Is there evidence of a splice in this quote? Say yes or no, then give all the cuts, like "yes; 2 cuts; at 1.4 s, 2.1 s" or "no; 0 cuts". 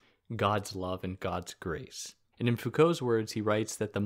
yes; 1 cut; at 2.3 s